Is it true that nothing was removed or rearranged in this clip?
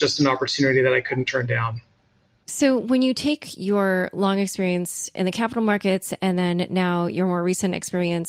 yes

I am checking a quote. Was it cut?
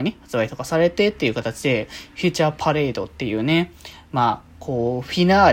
no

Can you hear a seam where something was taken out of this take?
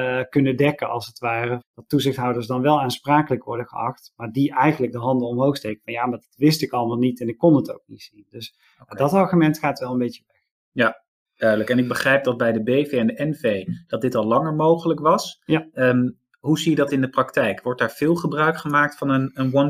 yes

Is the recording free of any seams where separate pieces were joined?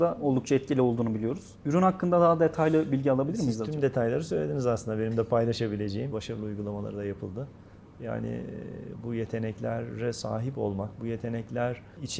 no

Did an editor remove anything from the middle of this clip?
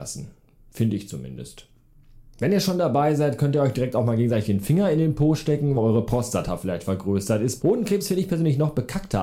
yes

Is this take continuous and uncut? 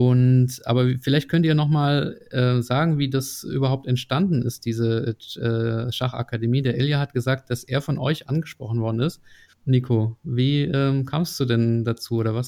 no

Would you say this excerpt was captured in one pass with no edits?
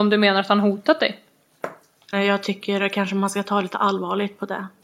no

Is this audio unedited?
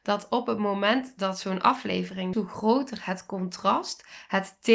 no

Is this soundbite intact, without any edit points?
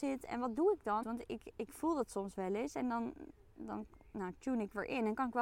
no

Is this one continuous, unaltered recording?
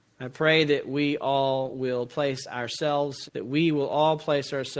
no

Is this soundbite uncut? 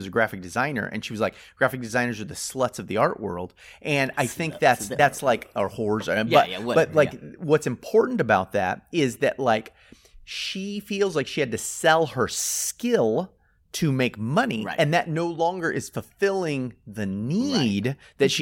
yes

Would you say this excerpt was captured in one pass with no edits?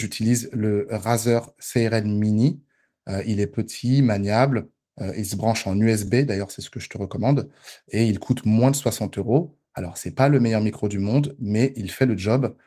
yes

